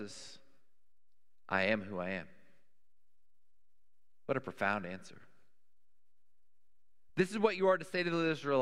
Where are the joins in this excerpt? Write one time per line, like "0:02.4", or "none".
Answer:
none